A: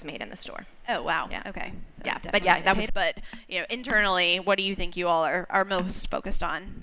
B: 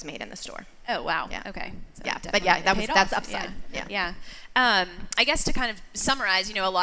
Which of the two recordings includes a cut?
A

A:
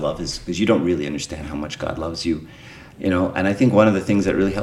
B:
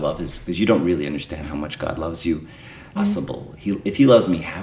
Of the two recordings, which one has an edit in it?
B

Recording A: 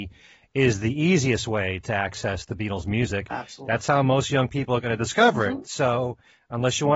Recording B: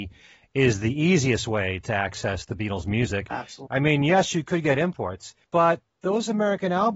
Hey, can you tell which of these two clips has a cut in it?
B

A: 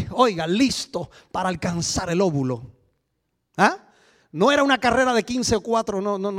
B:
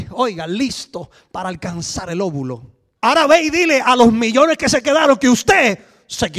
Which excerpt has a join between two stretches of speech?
B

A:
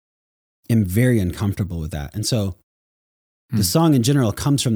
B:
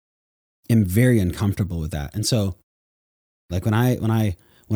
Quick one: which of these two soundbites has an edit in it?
B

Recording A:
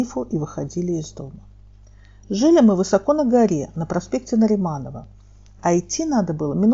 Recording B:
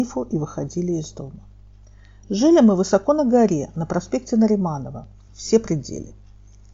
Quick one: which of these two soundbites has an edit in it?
B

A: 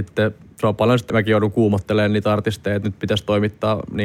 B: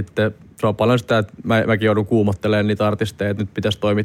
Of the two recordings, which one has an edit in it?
A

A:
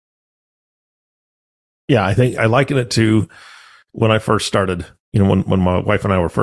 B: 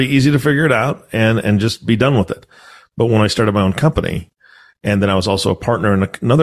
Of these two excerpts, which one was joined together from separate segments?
A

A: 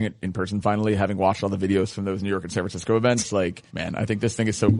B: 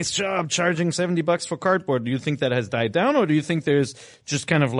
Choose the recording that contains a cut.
A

